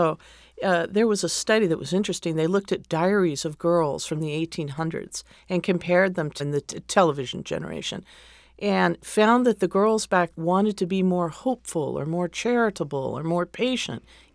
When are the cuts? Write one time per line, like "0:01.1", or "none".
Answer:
0:06.4
0:10.3